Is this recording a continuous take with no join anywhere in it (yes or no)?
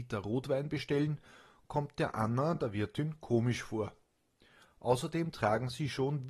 yes